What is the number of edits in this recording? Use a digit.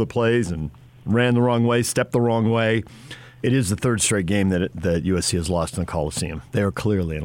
1